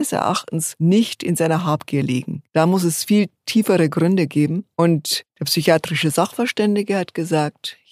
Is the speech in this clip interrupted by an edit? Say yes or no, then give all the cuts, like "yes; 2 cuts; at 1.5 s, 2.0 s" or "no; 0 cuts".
no; 0 cuts